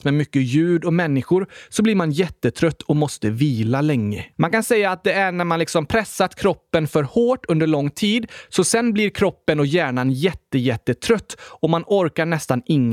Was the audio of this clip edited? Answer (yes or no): yes